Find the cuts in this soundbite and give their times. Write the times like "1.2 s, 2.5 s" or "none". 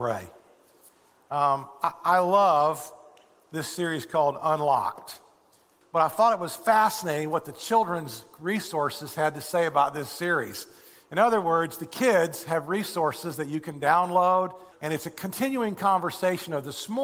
5.8 s, 14.7 s